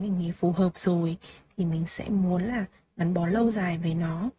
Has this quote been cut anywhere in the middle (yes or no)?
no